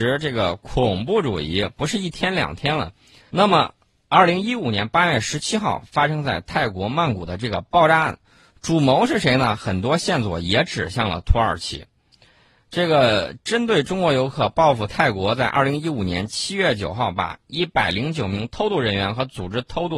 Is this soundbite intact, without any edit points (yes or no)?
no